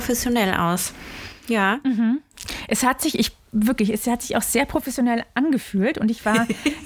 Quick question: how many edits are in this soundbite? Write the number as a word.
zero